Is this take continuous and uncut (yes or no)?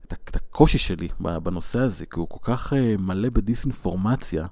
yes